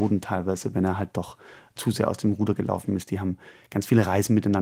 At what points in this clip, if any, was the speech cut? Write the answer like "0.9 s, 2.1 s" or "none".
none